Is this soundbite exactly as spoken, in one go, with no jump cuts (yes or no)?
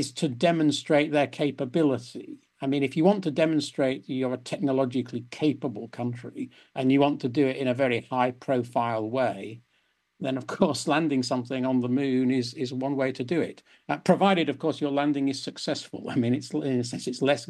yes